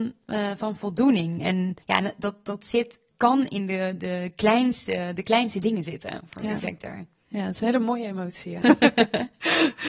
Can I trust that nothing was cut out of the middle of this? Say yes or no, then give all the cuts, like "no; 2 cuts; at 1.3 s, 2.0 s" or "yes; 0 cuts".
no; 2 cuts; at 1.8 s, 8.6 s